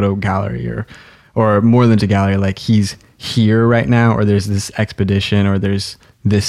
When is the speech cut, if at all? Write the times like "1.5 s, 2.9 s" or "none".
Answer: 2.0 s